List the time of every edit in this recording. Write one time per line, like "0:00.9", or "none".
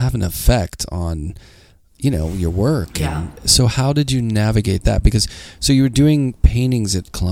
none